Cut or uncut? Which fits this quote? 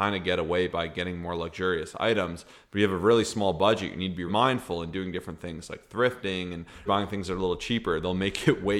cut